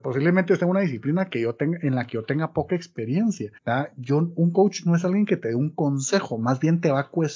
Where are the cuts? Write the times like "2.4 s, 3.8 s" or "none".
3.6 s